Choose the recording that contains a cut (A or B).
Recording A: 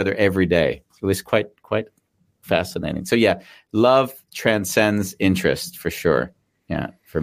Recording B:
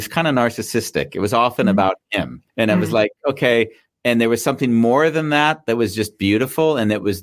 B